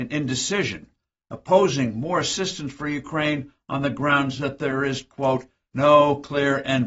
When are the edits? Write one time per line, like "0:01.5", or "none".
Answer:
none